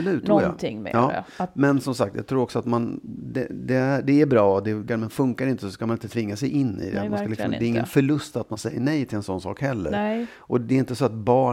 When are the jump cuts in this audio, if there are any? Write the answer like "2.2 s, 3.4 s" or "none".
4.9 s